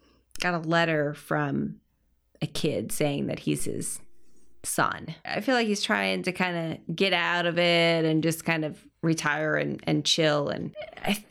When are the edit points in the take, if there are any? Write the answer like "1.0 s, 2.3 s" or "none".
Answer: 5.3 s